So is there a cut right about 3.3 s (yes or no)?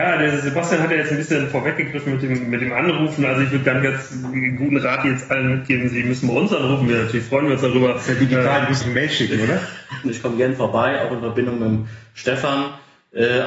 no